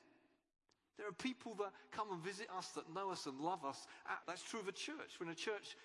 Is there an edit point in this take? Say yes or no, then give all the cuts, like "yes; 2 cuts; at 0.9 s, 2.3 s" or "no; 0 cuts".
yes; 1 cut; at 4.2 s